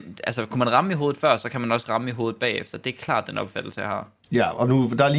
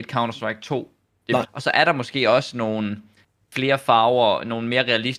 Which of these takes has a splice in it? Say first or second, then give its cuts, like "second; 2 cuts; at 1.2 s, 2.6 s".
second; 1 cut; at 1.4 s